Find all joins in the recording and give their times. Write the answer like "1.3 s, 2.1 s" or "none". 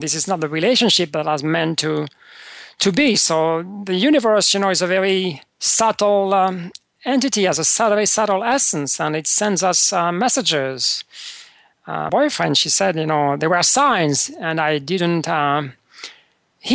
5.5 s, 12.1 s